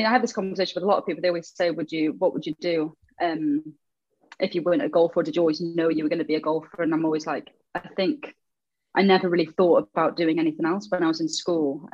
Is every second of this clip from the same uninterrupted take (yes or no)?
yes